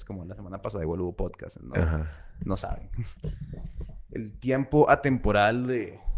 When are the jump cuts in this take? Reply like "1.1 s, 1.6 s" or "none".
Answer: 1.6 s